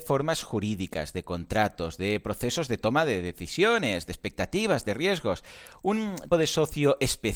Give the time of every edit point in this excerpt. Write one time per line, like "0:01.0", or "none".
0:06.3